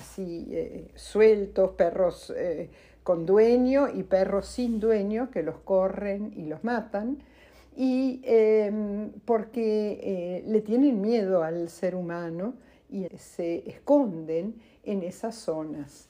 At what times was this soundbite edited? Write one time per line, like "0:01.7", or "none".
0:13.1